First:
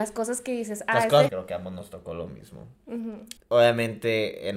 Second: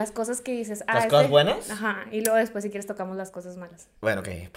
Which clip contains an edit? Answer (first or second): first